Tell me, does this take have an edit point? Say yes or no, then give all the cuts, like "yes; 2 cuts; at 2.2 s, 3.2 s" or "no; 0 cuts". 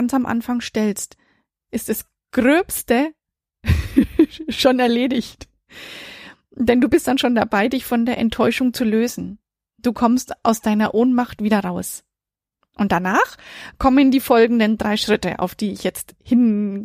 no; 0 cuts